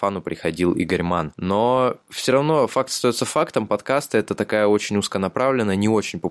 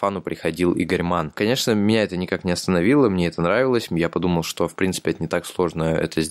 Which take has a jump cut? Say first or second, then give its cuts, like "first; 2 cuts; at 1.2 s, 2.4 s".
second; 1 cut; at 1.3 s